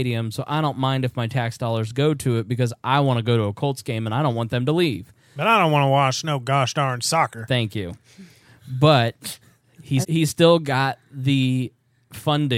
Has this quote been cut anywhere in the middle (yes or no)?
yes